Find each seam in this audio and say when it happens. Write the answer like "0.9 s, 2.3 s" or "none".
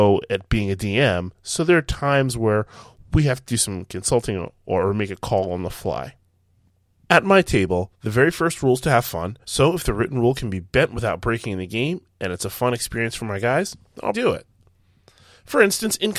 9.4 s, 14.1 s